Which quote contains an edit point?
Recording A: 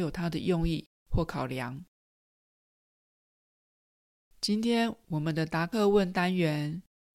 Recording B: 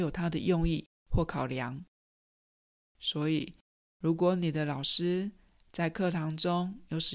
B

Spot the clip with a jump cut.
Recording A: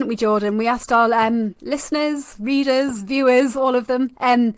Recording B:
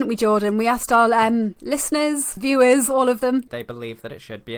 B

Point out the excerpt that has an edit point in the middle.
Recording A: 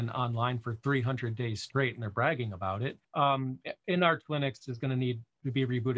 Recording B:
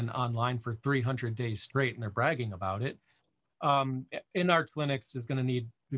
A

